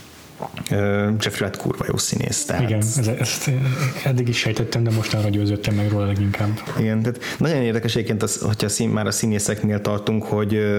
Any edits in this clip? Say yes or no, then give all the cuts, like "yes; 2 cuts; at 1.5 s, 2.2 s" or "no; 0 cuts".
no; 0 cuts